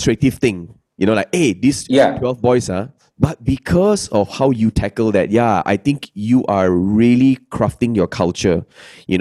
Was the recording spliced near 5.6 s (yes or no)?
no